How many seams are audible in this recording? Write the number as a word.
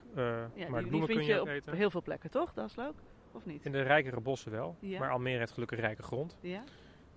zero